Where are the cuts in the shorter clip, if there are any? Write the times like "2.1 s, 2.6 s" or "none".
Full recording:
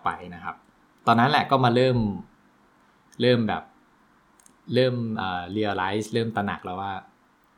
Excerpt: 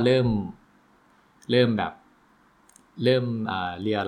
none